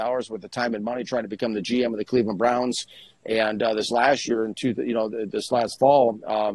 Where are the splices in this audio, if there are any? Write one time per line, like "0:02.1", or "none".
none